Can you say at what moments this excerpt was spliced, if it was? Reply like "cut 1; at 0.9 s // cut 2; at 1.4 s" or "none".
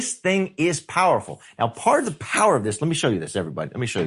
none